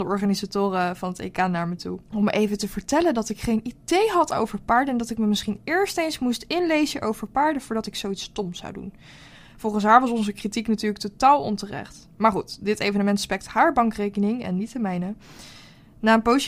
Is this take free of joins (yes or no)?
no